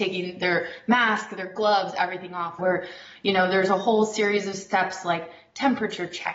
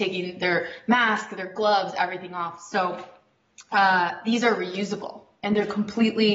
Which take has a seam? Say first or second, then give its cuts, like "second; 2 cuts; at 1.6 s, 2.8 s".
first; 1 cut; at 2.6 s